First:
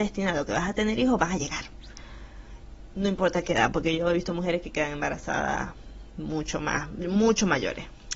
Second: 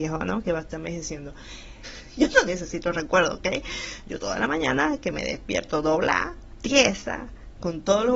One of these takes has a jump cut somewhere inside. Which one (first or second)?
second